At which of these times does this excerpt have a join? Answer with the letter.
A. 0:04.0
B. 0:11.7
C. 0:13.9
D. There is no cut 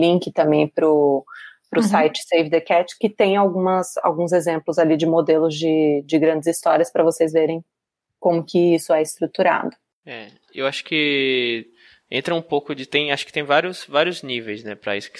D